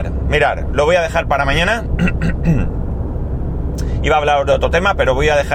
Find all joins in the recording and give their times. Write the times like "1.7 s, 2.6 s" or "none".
none